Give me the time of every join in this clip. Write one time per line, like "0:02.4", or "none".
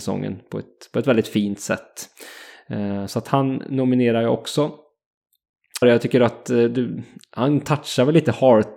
0:05.8